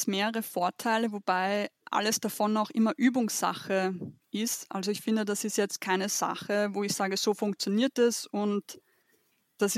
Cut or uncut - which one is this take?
uncut